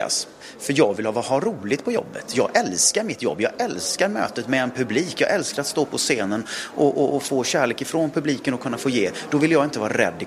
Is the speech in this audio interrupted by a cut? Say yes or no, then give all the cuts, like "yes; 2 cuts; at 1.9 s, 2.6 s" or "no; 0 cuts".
no; 0 cuts